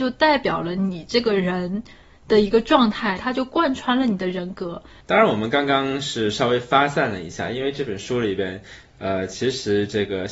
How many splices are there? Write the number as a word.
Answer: one